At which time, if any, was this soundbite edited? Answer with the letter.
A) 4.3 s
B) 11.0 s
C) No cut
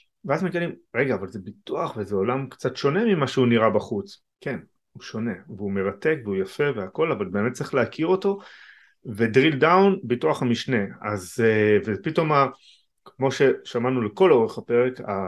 A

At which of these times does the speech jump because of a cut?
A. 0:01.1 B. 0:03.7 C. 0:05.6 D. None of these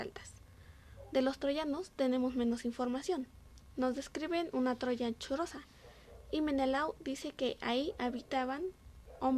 A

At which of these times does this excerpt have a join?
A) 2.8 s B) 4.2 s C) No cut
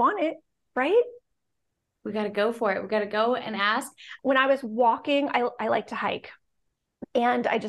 B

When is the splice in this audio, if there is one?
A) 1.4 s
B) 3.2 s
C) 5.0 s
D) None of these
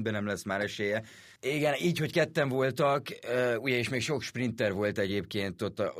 A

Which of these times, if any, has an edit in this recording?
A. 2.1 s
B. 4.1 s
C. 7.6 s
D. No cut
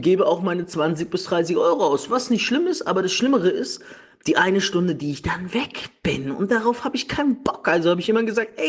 D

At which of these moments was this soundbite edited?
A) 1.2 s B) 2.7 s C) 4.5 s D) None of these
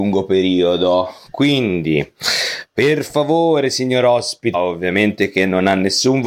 C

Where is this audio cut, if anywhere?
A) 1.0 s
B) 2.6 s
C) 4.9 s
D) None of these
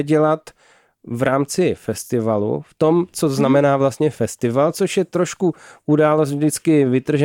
D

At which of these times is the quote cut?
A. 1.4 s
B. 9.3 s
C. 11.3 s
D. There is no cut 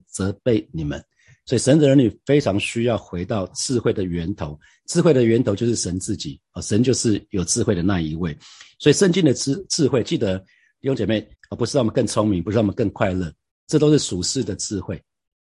C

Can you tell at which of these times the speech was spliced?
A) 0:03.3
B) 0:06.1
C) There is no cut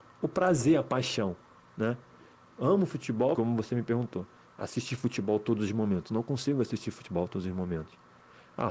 A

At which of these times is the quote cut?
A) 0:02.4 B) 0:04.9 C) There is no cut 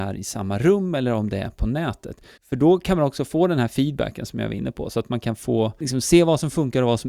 A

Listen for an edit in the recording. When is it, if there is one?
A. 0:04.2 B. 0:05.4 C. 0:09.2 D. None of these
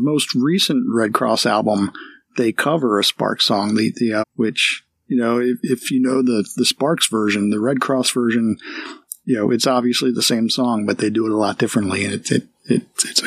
A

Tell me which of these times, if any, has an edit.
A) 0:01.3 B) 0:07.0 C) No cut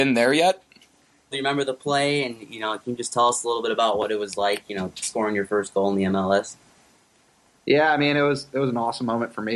A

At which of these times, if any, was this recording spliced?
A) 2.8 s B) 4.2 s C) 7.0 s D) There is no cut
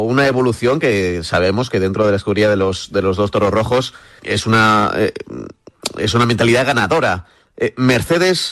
B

